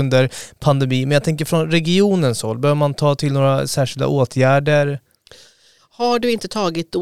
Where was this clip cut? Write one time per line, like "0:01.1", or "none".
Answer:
0:05.8